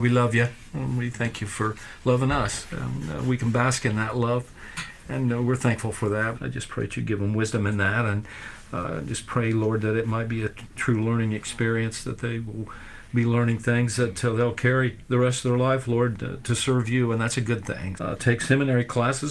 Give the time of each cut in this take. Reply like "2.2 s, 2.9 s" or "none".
6.3 s, 18.0 s